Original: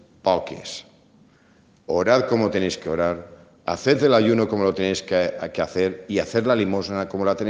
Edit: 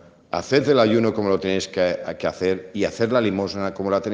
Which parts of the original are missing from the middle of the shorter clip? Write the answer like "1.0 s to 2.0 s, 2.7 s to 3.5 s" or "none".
none